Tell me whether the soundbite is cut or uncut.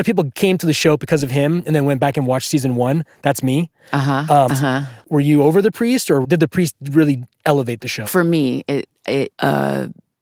cut